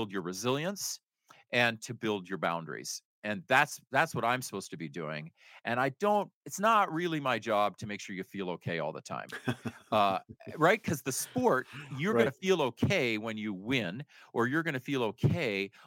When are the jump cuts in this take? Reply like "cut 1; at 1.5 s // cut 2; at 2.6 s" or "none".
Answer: none